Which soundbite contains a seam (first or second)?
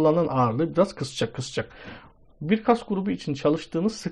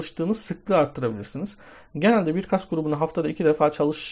first